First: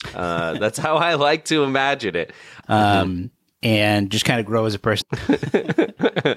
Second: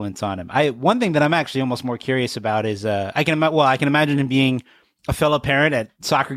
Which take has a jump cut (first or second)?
first